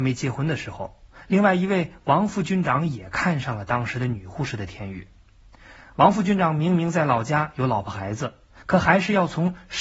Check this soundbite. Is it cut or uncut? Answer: uncut